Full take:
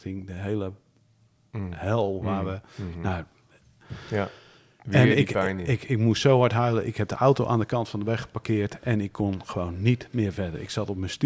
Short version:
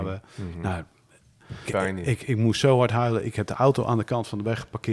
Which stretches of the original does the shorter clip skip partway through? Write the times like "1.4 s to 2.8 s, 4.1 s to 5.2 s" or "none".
4.1 s to 5.3 s